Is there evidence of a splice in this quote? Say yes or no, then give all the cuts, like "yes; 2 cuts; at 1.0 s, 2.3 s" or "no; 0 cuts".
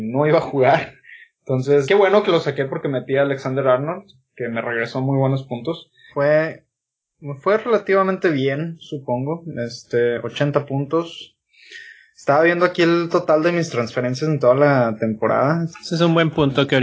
yes; 3 cuts; at 1.8 s, 6.1 s, 15.7 s